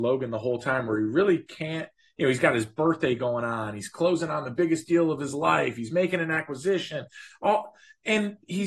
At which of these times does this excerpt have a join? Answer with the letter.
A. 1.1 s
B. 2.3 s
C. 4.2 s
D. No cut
D